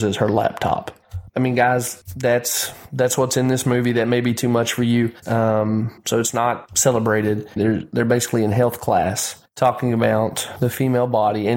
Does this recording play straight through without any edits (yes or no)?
no